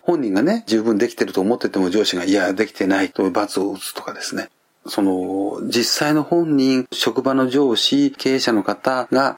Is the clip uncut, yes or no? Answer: yes